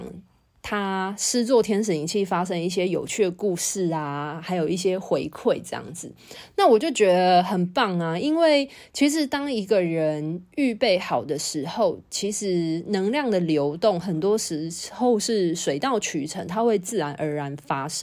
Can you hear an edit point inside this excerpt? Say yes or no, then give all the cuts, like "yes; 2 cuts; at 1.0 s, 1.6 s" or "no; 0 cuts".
no; 0 cuts